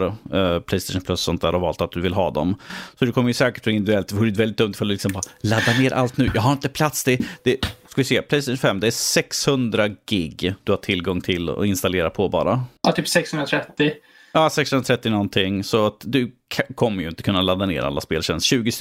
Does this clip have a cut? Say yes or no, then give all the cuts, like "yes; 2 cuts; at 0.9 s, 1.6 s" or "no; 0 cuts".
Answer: yes; 1 cut; at 12.8 s